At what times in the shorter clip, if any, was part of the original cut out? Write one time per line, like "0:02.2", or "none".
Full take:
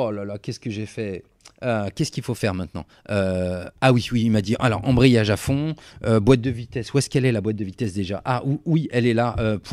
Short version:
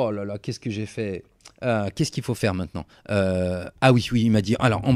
none